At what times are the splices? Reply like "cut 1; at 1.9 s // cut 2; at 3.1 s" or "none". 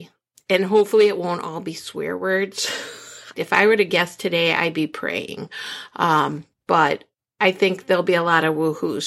cut 1; at 3.3 s